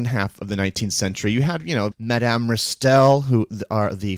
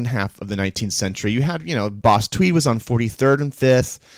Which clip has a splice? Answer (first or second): first